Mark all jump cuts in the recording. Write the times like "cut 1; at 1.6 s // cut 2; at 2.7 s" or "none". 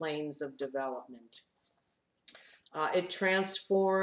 cut 1; at 2.6 s